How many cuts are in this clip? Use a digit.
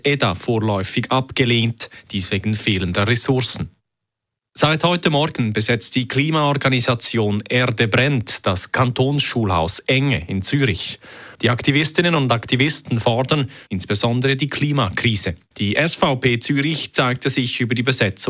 3